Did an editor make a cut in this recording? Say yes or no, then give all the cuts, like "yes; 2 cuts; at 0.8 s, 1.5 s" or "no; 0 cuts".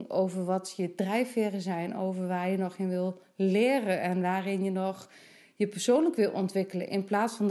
no; 0 cuts